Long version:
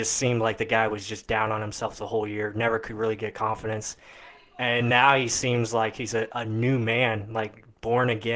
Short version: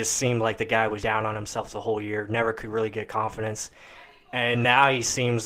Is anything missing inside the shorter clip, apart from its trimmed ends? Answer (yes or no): yes